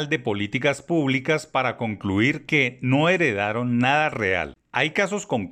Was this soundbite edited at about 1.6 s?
no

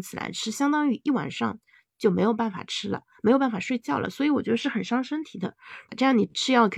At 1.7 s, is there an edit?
no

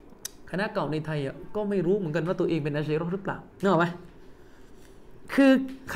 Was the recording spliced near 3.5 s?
yes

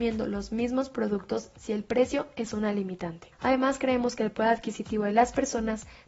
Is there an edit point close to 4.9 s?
no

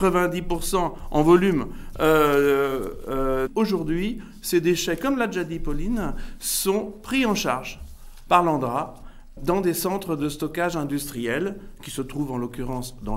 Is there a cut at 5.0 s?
no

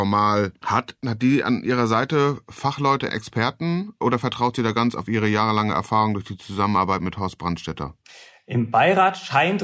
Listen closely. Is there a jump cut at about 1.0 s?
yes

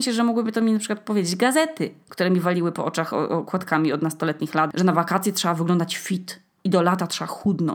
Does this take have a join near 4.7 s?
yes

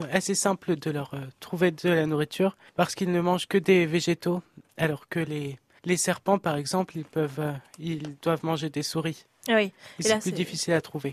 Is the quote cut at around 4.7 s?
no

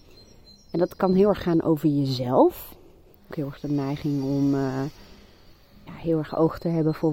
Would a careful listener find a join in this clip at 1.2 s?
no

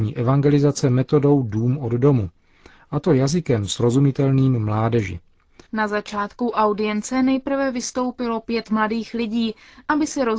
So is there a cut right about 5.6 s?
yes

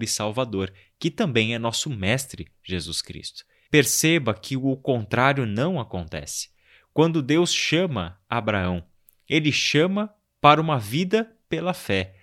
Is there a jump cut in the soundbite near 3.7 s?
yes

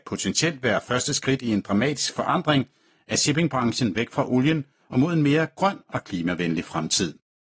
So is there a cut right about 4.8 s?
yes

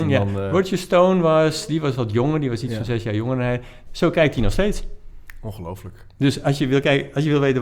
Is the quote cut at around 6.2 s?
no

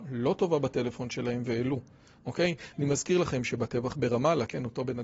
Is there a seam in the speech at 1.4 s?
no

